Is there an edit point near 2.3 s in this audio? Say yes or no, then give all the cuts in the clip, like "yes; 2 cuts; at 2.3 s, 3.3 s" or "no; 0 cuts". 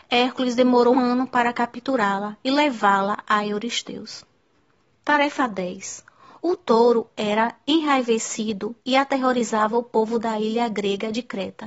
no; 3 cuts; at 0.9 s, 4.9 s, 6.4 s